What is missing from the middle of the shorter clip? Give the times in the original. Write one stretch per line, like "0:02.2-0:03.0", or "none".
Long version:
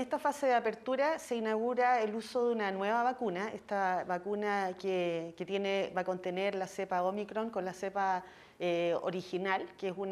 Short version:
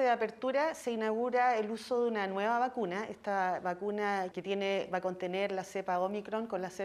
0:04.8-0:05.3